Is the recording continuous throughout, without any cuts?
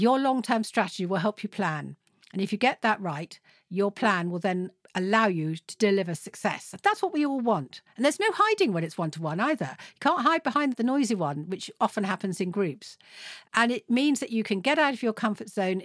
yes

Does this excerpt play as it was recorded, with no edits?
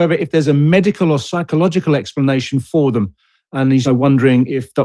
no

